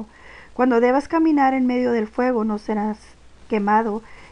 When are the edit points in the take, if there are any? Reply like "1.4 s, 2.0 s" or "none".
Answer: none